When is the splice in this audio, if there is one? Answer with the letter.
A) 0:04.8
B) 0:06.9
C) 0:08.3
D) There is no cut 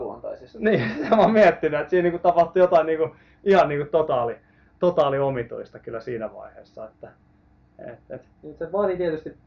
C